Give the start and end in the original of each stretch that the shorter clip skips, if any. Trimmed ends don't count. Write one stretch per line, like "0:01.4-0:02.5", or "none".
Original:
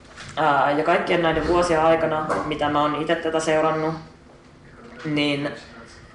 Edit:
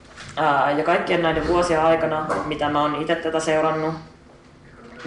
none